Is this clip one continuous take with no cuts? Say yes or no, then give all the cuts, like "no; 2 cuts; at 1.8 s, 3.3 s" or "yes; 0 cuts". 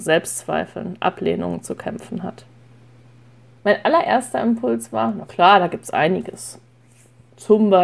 no; 1 cut; at 3.6 s